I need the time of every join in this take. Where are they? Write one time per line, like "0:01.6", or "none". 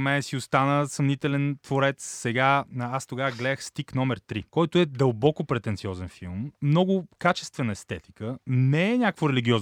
0:04.5